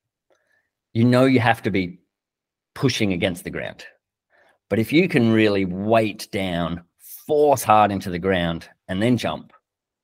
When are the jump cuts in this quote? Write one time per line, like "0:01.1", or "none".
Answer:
none